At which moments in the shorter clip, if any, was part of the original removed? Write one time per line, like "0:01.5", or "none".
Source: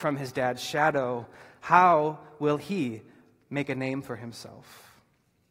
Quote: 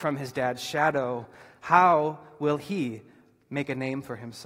none